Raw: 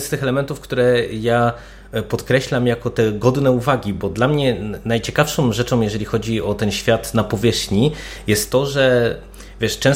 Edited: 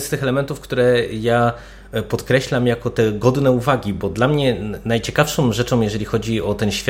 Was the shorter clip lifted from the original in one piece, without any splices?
yes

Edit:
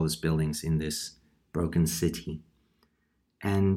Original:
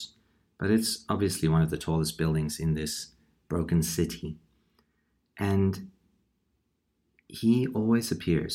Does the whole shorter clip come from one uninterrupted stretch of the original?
yes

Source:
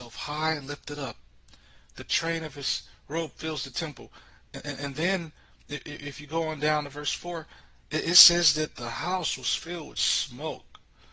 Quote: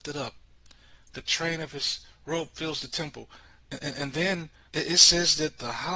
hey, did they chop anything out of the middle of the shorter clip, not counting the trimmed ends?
yes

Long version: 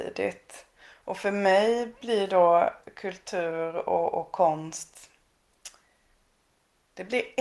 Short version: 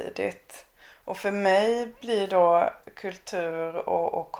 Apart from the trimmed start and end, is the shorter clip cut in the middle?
no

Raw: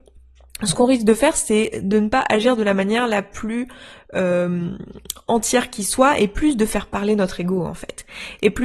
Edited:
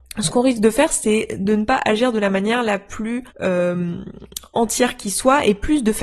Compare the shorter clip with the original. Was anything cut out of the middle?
yes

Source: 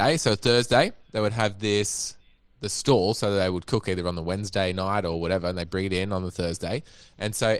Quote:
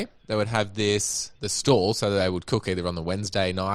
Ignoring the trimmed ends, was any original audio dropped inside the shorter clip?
yes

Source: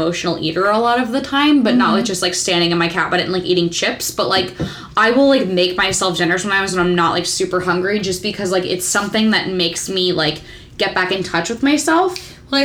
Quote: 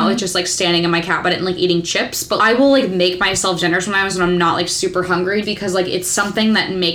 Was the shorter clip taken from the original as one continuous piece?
no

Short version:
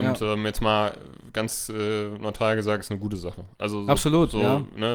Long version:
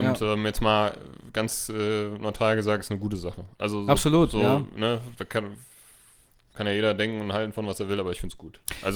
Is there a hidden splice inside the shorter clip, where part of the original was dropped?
no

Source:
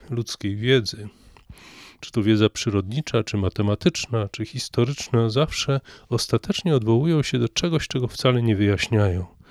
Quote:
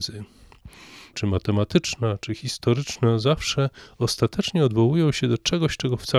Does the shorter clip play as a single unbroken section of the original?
no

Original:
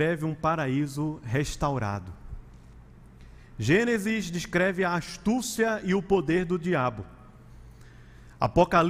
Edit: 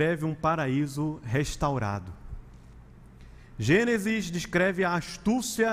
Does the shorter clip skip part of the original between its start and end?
no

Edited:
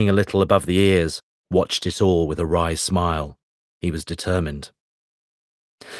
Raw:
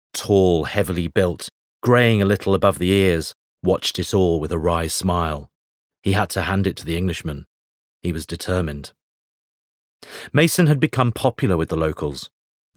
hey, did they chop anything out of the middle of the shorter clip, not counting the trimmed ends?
yes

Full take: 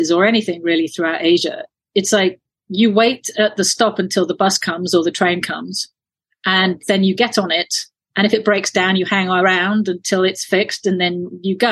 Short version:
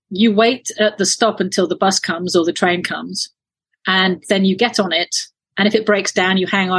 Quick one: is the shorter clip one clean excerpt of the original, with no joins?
yes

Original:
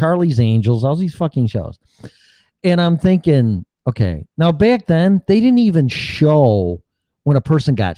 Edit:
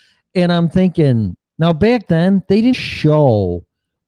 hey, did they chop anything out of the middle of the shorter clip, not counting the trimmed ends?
yes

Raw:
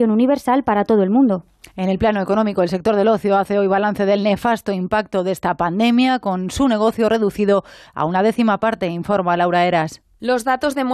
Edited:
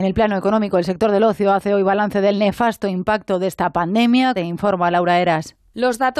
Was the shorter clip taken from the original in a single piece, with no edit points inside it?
no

